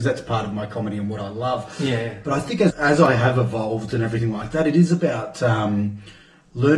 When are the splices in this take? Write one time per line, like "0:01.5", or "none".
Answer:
0:02.7